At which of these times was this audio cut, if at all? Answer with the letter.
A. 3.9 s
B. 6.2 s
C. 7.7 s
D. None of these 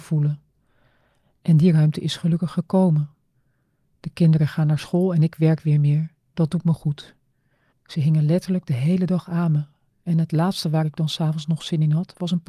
C